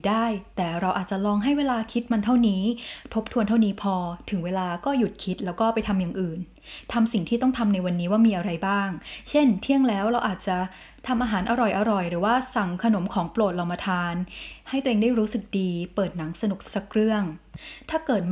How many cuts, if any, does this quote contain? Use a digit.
1